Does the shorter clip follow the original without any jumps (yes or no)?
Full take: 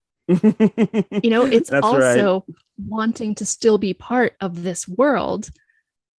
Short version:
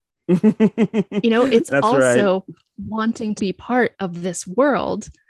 no